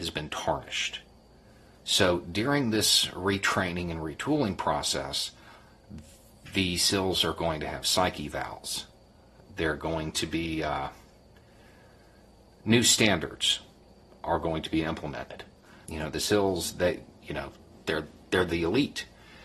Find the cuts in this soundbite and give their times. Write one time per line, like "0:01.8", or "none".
0:15.9
0:17.2

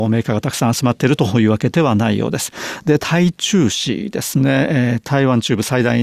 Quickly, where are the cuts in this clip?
0:03.0

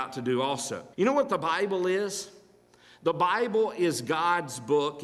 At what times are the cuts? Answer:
0:00.9

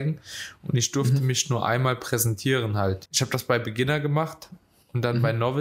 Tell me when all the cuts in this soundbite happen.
0:03.1

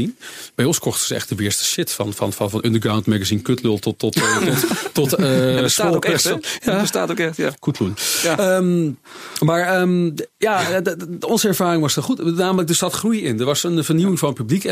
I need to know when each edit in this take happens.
0:07.6

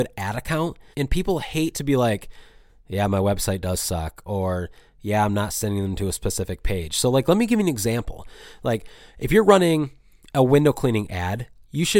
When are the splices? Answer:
0:00.9

